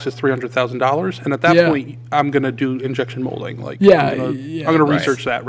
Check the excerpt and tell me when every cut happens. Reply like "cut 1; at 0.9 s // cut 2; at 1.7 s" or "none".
none